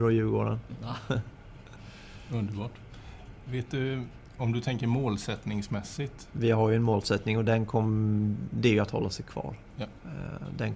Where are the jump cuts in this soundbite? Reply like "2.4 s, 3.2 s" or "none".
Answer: 6.3 s